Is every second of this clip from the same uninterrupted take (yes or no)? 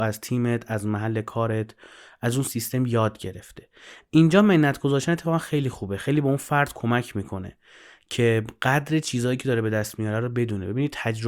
yes